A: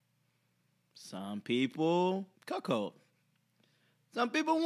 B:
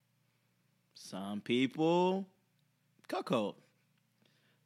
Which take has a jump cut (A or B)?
A